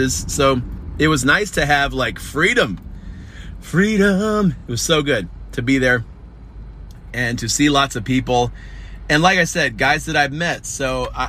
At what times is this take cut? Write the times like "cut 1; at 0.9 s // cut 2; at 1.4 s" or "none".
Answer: none